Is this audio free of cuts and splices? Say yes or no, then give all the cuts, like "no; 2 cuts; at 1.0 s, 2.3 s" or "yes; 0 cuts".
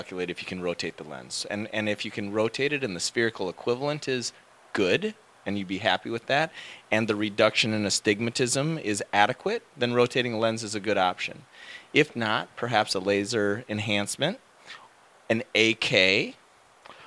yes; 0 cuts